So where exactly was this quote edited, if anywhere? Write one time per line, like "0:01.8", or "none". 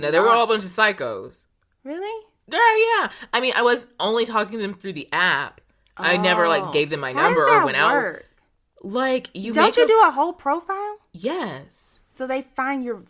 none